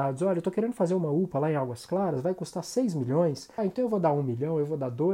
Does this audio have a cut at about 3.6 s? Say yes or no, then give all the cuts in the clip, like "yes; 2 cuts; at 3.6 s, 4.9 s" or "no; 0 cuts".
yes; 1 cut; at 3.6 s